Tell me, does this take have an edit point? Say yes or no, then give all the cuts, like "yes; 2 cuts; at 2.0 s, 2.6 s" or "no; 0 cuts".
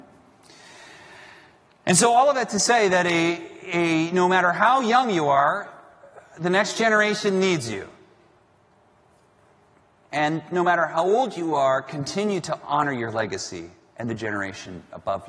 no; 0 cuts